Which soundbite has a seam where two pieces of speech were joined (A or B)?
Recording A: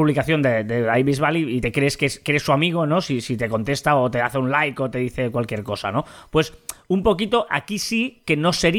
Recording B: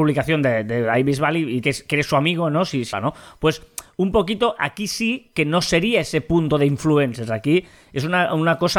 B